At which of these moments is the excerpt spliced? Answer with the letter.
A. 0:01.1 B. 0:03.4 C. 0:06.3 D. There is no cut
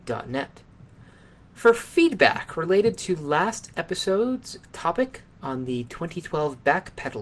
D